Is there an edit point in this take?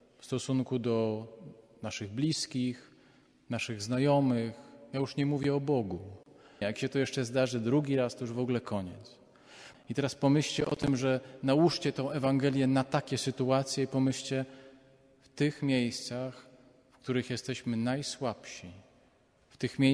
yes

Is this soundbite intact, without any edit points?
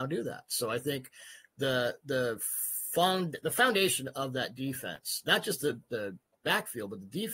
yes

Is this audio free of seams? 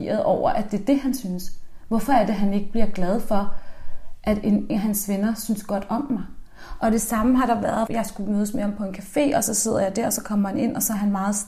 no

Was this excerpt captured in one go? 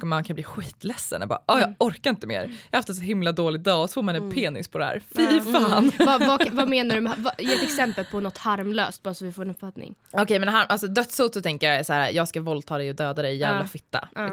yes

